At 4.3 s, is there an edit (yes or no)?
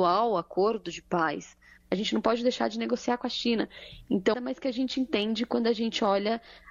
yes